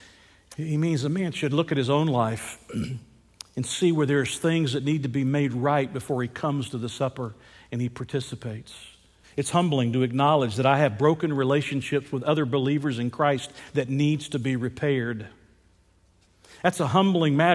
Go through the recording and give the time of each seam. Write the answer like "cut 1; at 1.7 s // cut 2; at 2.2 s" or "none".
cut 1; at 9.2 s